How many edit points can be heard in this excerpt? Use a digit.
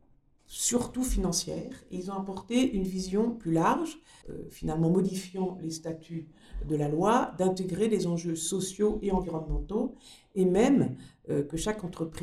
1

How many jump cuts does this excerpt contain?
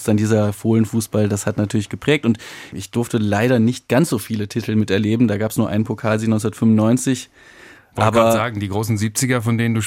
0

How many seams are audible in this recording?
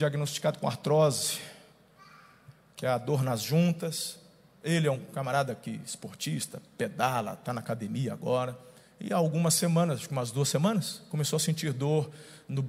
0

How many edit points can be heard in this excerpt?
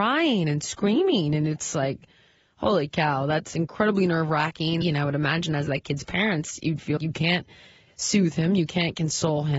2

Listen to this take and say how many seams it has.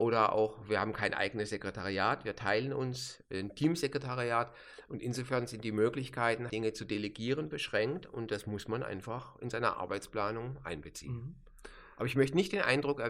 1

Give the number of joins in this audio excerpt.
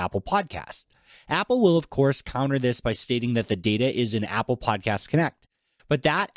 0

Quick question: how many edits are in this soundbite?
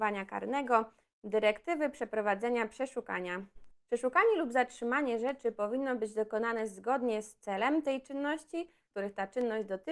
2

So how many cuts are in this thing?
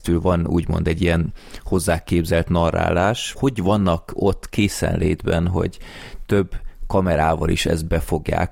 1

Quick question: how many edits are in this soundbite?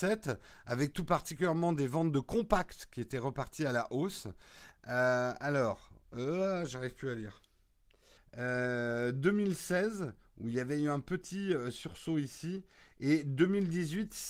2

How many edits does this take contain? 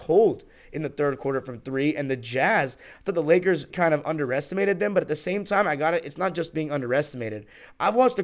1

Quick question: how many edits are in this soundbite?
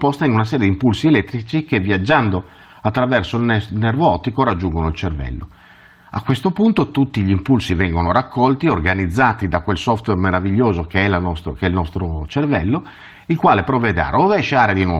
0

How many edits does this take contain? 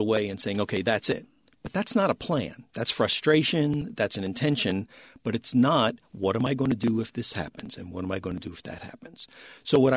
0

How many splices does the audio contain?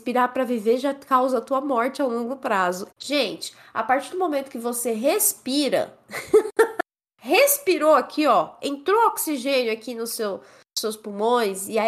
1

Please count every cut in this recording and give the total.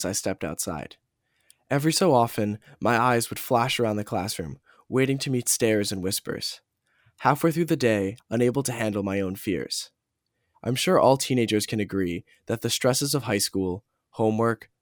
2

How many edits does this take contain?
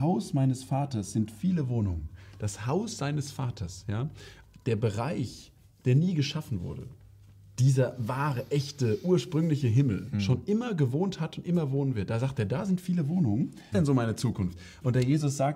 2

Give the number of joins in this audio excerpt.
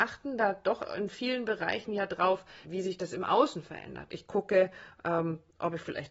2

